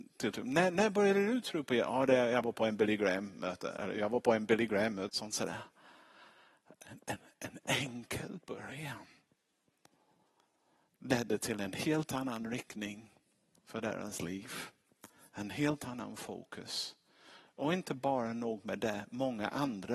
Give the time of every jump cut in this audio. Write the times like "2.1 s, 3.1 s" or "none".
5.1 s